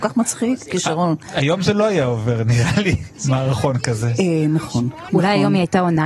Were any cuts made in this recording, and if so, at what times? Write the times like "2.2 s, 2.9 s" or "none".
none